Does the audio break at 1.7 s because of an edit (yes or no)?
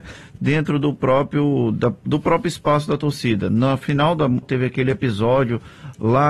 no